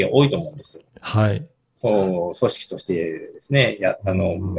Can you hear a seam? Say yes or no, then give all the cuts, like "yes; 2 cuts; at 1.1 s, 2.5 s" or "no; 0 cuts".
yes; 1 cut; at 1.8 s